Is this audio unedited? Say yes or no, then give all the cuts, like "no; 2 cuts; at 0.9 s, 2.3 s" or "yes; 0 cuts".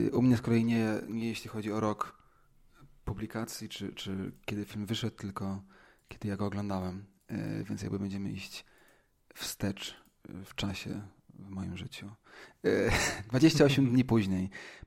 yes; 0 cuts